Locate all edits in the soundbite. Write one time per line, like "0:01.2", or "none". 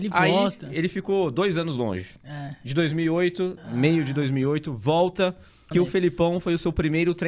0:03.6
0:05.7